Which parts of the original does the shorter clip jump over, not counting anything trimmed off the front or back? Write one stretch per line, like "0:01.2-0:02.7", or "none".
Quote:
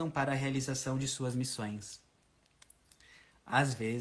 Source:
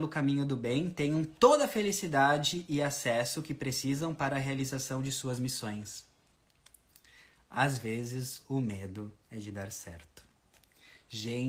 none